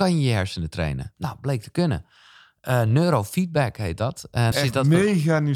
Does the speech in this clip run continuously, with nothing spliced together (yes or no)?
no